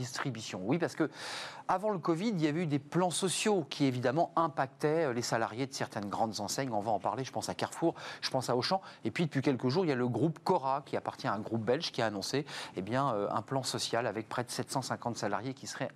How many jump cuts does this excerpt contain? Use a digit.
0